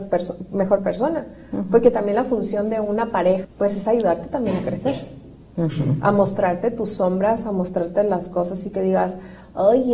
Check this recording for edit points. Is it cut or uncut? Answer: cut